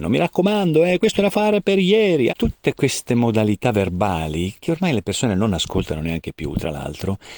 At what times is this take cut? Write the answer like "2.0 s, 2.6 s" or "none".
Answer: 2.3 s